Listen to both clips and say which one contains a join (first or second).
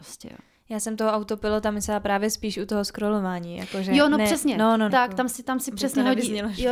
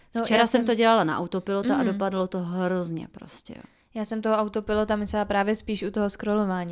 first